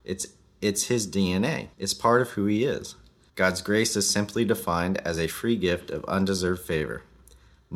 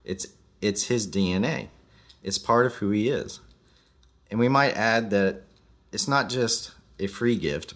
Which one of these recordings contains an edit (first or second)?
first